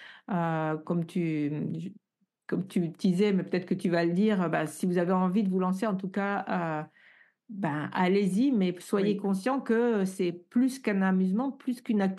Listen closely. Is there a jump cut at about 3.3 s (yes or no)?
no